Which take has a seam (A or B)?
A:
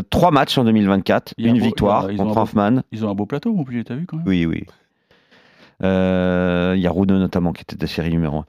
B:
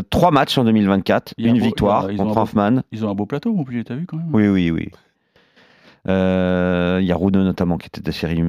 A